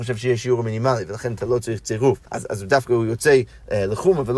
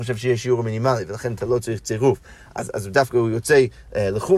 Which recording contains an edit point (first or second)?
first